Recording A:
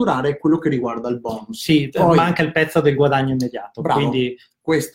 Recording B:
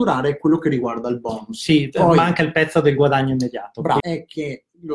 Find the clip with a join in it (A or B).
B